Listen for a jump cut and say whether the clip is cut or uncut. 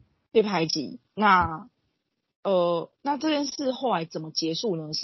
cut